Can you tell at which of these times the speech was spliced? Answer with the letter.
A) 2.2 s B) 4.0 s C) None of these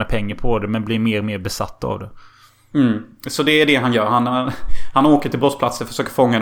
C